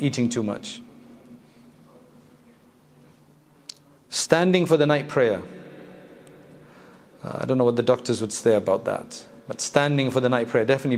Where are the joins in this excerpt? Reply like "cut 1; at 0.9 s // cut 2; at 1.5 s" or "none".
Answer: none